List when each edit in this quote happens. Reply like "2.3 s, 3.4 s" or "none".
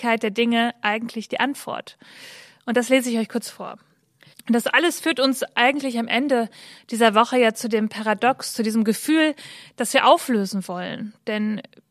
4.3 s